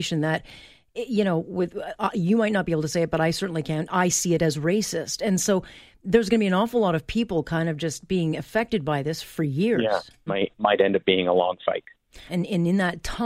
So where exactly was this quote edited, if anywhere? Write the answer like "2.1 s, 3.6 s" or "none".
10.3 s, 12.3 s